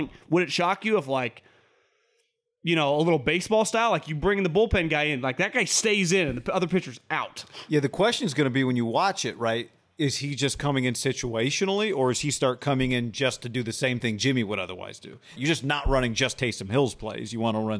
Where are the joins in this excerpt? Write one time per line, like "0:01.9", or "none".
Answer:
0:15.4